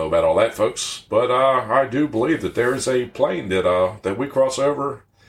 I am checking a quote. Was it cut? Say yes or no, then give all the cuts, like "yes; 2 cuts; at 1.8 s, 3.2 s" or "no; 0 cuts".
no; 0 cuts